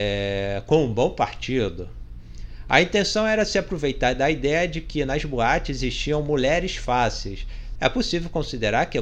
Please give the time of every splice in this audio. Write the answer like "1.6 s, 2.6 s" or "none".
7.8 s